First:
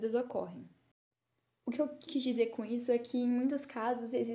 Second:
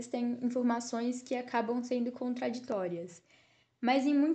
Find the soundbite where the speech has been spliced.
first; 1 cut; at 2.1 s

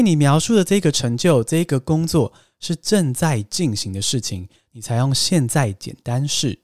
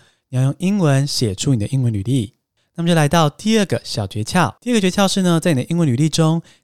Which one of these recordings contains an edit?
second; 1 cut; at 4.6 s

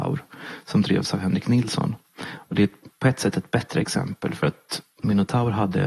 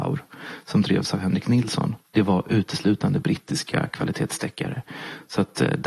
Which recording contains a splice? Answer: second; 1 cut; at 2.1 s

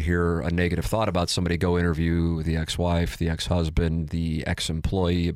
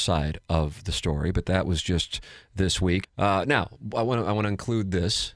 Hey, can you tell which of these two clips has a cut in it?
second; 1 cut; at 3.0 s

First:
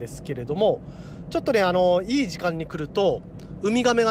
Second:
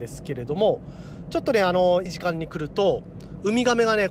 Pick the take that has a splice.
second; 1 cut; at 2.1 s

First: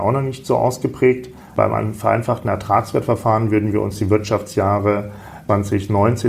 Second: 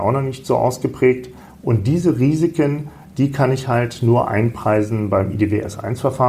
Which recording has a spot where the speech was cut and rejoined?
first; 1 cut; at 1.5 s

